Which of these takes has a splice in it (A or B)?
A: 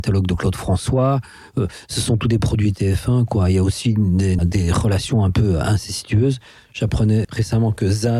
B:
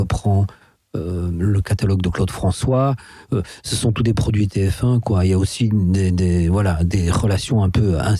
A